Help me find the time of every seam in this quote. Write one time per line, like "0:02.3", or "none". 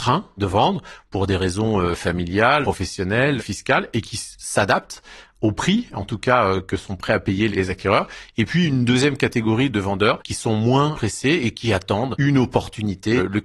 none